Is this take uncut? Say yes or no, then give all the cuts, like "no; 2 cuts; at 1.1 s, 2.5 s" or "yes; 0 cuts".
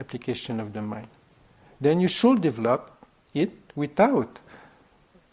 yes; 0 cuts